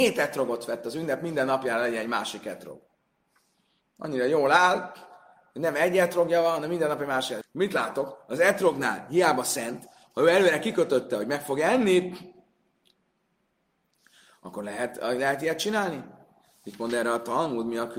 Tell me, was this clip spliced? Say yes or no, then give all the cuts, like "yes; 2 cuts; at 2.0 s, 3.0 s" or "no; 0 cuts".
yes; 1 cut; at 7.4 s